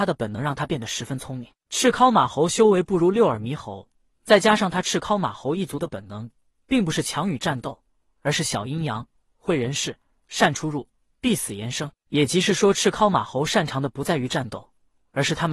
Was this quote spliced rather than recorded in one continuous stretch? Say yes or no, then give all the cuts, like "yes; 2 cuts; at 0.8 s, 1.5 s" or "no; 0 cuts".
no; 0 cuts